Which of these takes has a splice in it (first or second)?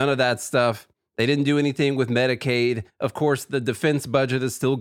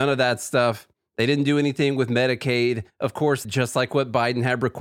second